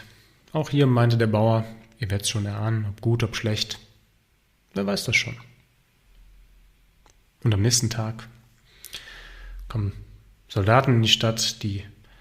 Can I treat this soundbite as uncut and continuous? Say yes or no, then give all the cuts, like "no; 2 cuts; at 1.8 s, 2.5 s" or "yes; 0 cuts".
yes; 0 cuts